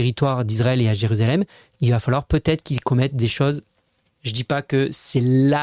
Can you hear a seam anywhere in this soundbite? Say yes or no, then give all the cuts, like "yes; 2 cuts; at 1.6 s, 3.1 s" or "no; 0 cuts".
yes; 1 cut; at 4.2 s